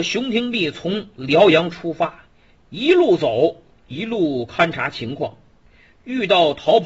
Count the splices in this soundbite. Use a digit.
0